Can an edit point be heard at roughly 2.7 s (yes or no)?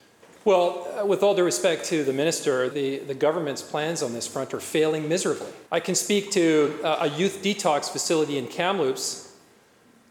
yes